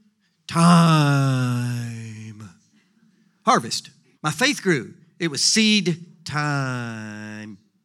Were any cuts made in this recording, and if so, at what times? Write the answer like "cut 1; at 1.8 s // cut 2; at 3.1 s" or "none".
cut 1; at 4.1 s